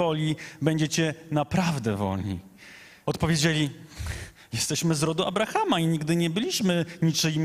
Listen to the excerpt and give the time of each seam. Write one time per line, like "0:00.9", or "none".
0:03.0